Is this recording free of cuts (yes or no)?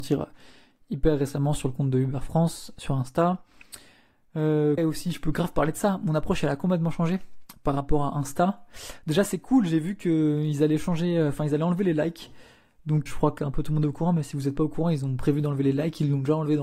no